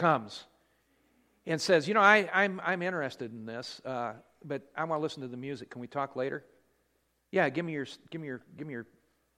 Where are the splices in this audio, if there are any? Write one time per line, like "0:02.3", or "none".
0:04.7